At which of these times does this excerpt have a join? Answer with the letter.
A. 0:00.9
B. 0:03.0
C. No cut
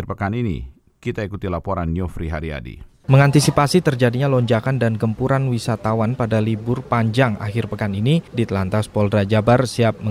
B